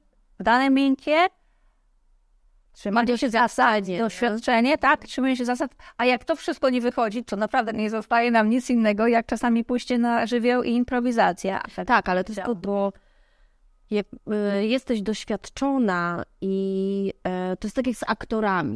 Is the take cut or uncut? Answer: cut